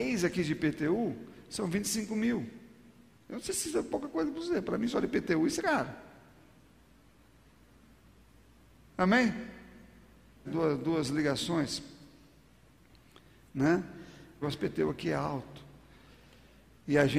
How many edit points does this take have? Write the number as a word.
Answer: three